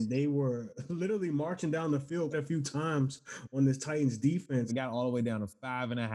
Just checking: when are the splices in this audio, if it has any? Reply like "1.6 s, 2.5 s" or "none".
2.3 s, 4.7 s